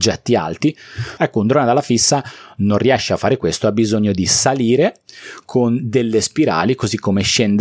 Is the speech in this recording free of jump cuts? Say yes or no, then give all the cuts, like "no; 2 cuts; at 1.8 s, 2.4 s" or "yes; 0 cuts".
no; 1 cut; at 1.2 s